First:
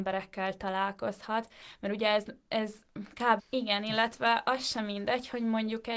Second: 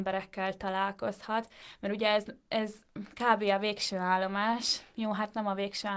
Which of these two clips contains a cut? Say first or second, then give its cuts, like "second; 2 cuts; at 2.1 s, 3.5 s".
first; 1 cut; at 3.4 s